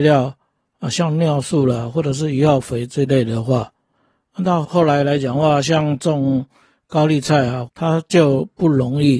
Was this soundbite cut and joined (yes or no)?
yes